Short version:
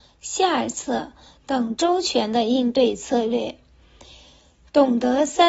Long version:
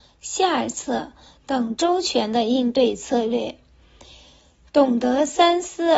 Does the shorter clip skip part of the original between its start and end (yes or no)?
no